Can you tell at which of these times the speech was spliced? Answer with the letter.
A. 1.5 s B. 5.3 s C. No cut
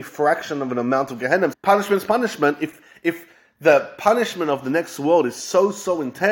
A